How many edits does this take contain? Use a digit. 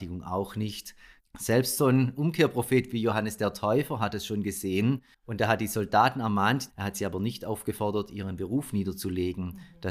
2